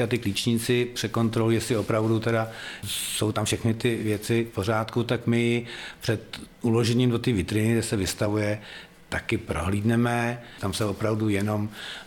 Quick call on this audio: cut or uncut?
uncut